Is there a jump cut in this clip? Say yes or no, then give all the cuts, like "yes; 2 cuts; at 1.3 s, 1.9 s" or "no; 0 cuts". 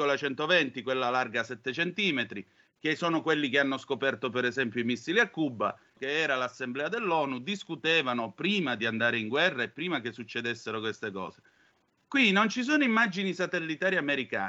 yes; 1 cut; at 6.0 s